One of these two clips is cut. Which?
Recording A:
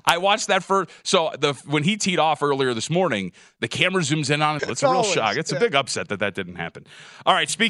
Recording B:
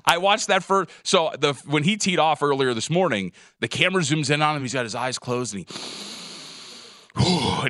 A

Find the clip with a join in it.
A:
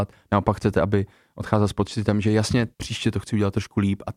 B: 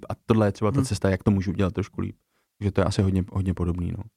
A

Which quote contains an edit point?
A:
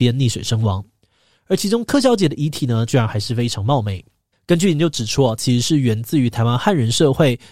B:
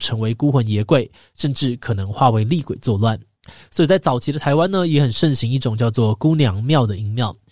A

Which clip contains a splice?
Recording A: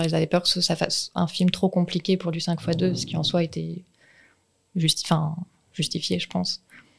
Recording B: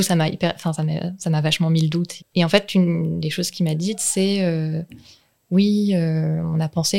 B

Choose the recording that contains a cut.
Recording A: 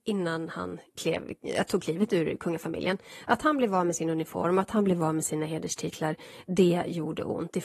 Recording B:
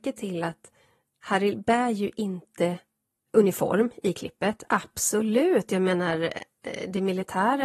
B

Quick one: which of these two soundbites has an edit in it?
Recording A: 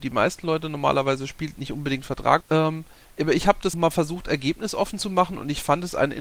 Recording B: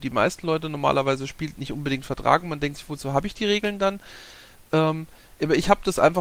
A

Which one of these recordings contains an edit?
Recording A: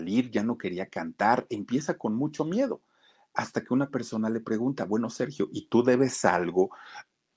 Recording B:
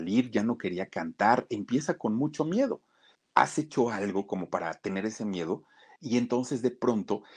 B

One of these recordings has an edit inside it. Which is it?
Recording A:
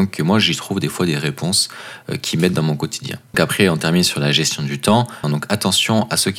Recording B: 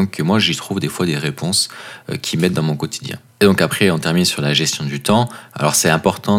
A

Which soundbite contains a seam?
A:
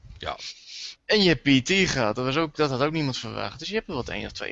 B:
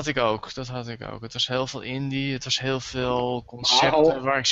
A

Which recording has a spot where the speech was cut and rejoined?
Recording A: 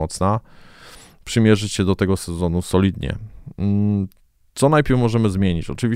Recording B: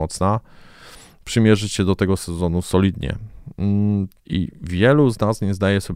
B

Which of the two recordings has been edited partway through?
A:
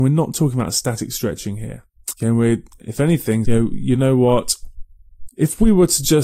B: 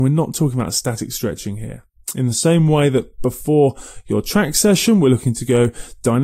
A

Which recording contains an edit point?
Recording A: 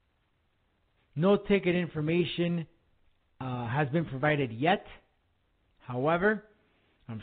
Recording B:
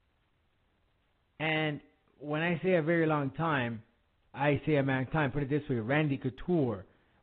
A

